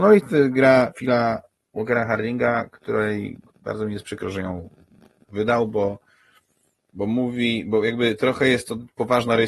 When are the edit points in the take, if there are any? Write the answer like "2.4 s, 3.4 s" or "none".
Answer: none